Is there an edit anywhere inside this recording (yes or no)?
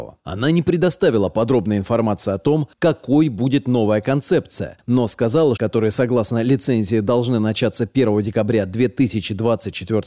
yes